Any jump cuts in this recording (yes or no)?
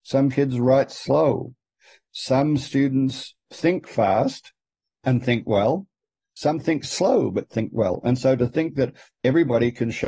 no